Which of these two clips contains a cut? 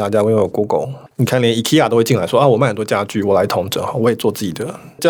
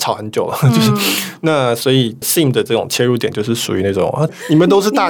first; 1 cut; at 1.1 s

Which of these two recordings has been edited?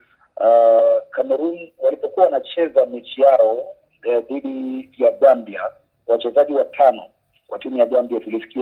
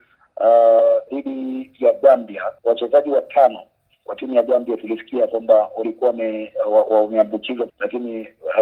second; 3 cuts; at 1.1 s, 2.6 s, 7.7 s

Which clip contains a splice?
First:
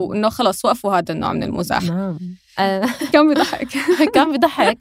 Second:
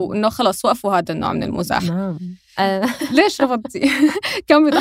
first; 1 cut; at 3.1 s

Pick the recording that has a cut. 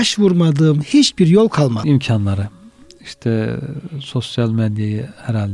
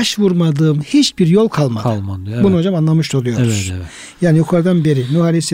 first; 1 cut; at 1.8 s

